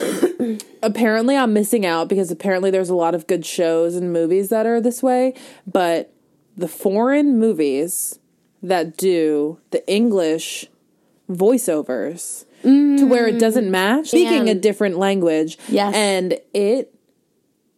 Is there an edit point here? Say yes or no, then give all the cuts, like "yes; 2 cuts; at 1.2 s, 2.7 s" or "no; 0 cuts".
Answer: yes; 2 cuts; at 9.7 s, 14.1 s